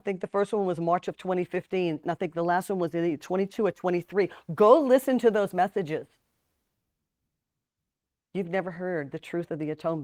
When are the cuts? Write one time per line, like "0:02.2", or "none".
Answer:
0:02.0